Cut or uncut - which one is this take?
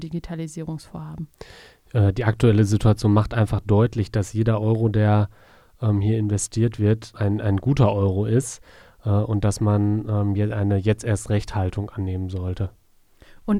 cut